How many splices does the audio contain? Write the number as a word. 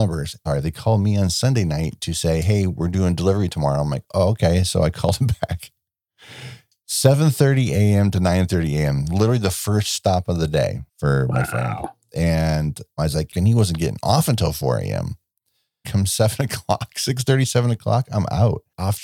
three